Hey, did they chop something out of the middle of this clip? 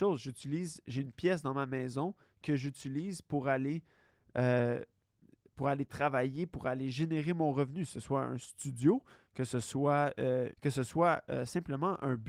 yes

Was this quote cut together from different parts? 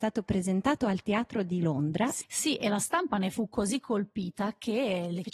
yes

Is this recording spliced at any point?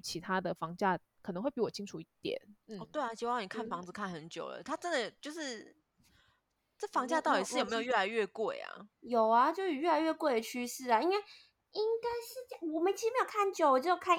yes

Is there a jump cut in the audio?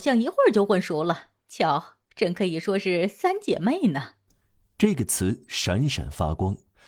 no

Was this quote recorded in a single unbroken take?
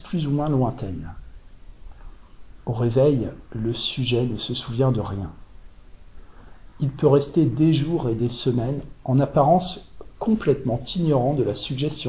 yes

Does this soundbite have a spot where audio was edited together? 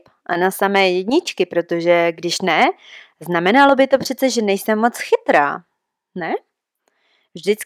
no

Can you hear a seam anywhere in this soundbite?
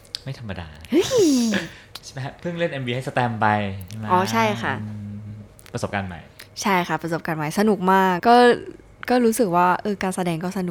yes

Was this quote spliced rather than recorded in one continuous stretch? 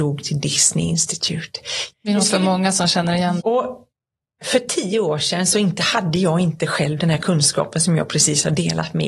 yes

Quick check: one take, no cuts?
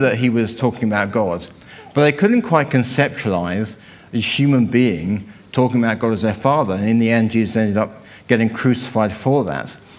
yes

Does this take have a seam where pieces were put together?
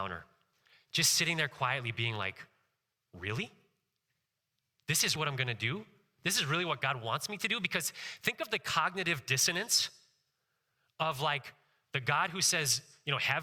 yes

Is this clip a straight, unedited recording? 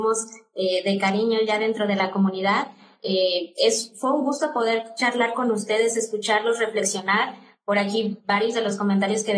yes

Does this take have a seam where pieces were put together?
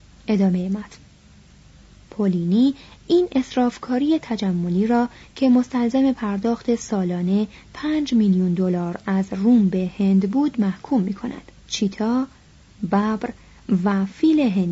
yes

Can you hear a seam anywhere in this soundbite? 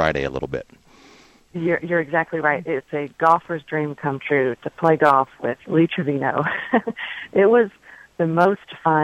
no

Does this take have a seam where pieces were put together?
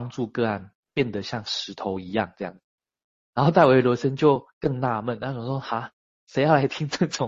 no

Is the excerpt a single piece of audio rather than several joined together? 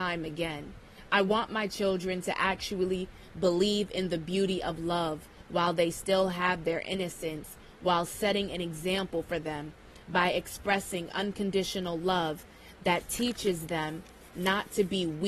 yes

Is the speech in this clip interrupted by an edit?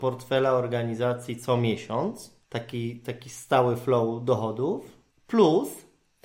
yes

